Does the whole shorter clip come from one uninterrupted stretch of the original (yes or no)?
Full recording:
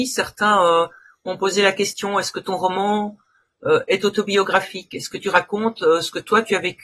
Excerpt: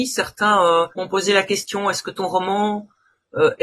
no